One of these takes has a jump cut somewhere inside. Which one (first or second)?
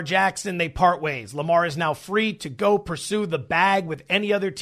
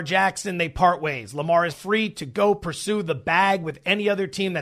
second